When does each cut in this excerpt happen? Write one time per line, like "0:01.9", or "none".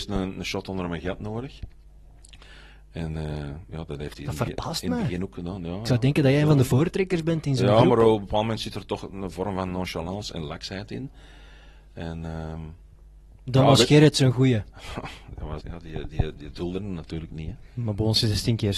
0:15.6